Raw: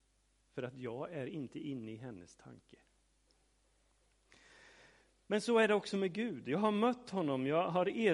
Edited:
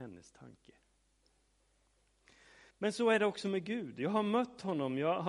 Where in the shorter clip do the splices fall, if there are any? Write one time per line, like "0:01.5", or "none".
0:02.7